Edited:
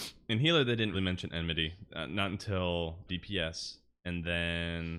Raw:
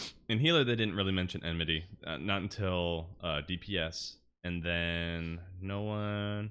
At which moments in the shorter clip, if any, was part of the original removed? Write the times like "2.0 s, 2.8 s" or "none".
0.9 s, 3.1 s